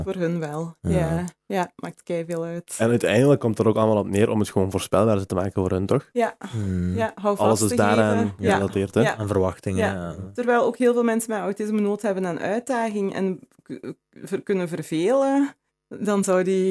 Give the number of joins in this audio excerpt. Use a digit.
1